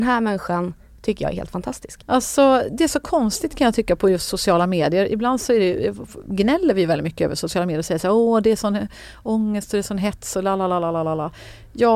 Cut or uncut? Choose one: cut